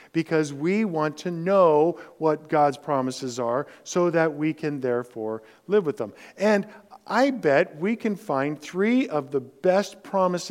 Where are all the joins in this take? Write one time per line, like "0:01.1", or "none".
none